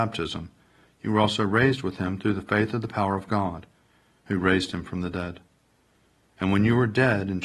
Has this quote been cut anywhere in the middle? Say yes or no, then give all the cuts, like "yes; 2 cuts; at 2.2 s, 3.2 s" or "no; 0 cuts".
no; 0 cuts